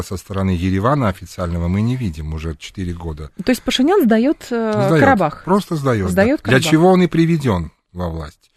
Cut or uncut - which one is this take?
uncut